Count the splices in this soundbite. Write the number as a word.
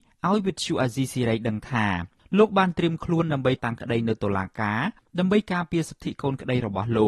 one